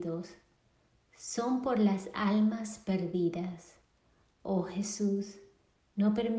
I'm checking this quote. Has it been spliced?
no; 0 cuts

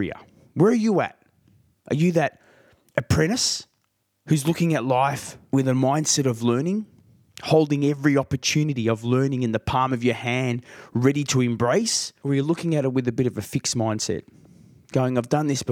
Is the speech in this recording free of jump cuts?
yes; 0 cuts

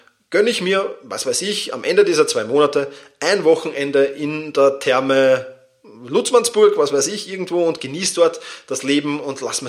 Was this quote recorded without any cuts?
yes; 0 cuts

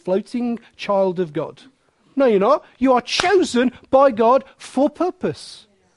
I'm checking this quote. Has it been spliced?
no; 0 cuts

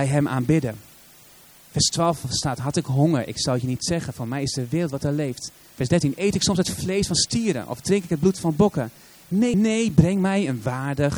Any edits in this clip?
yes; 1 cut; at 9.5 s

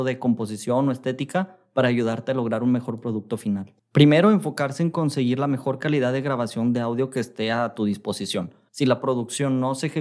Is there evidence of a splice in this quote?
yes; 2 cuts; at 3.8 s, 8.7 s

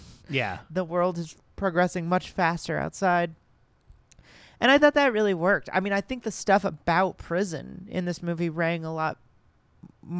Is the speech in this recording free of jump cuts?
yes; 0 cuts

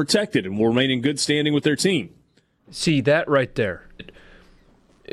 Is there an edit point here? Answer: yes; 2 cuts; at 2.6 s, 4.0 s

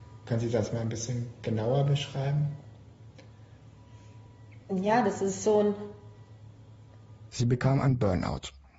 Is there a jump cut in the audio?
yes; 1 cut; at 7.3 s

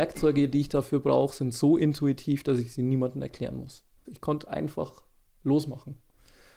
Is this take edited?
yes; 1 cut; at 4.1 s

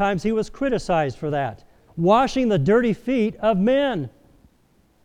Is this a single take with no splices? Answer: no; 1 cut; at 1.9 s

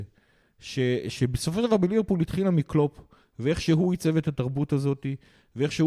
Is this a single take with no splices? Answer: yes; 0 cuts

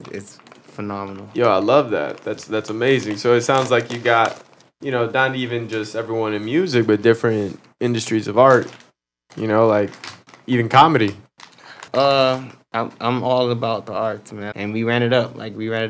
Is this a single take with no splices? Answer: no; 2 cuts; at 11.9 s, 14.5 s

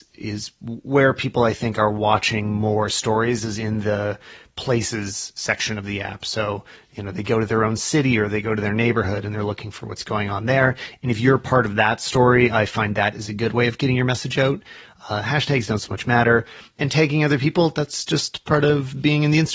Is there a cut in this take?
no; 0 cuts

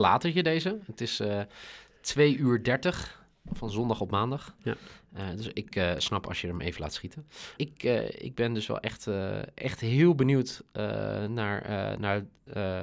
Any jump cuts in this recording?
yes; 1 cut; at 7.6 s

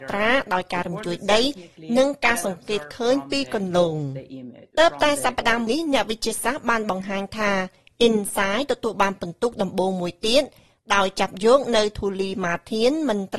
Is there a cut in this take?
yes; 1 cut; at 5.7 s

